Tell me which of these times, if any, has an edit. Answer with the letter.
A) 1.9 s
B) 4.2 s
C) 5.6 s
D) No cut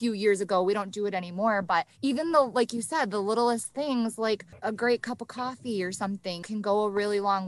A